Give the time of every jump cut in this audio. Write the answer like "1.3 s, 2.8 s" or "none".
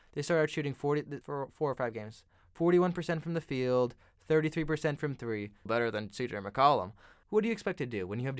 1.2 s, 5.7 s, 7.2 s